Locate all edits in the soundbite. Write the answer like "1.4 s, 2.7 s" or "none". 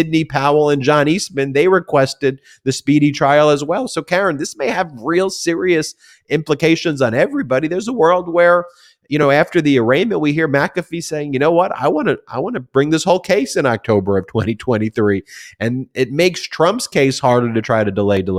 none